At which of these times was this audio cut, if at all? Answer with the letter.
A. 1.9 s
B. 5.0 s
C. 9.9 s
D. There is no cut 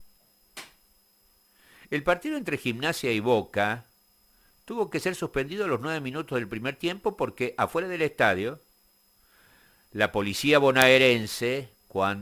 D